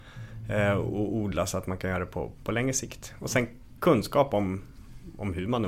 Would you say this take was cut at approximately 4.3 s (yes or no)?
no